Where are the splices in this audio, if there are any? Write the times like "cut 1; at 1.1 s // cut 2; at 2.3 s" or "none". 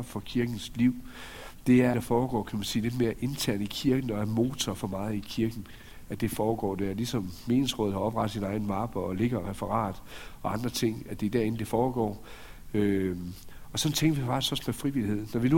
cut 1; at 1.9 s